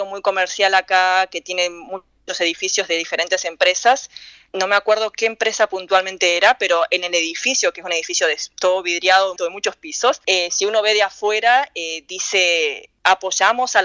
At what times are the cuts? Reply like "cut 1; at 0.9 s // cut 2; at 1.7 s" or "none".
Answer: cut 1; at 9.4 s